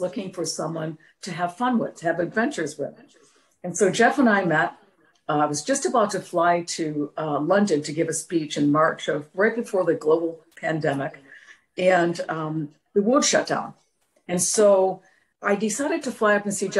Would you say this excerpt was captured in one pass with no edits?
yes; 0 cuts

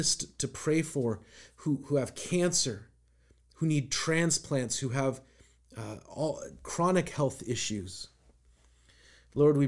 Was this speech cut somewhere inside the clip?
no; 0 cuts

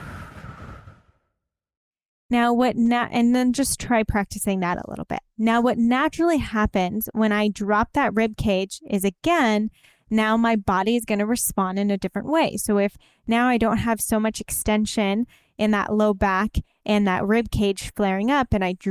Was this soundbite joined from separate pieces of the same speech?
no; 0 cuts

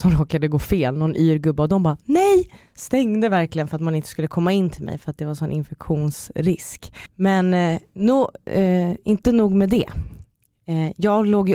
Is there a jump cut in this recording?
yes; 1 cut; at 7.1 s

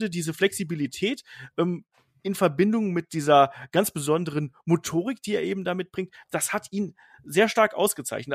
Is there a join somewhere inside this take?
no; 0 cuts

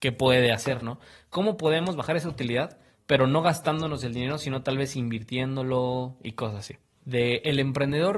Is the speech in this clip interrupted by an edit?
yes; 1 cut; at 7.0 s

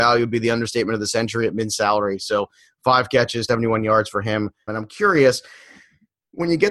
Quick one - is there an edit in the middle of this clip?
yes; 2 cuts; at 3.5 s, 4.7 s

